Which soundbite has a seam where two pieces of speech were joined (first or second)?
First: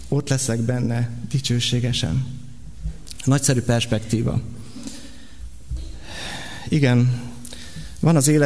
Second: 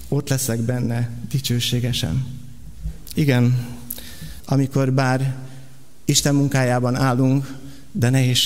second